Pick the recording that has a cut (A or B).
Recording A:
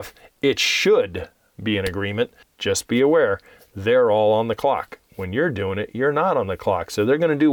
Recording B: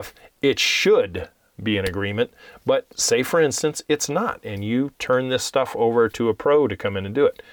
A